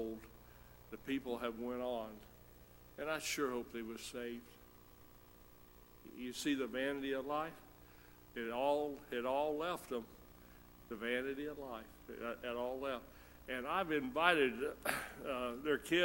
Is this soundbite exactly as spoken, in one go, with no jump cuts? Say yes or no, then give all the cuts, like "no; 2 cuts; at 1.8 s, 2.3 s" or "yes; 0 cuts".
yes; 0 cuts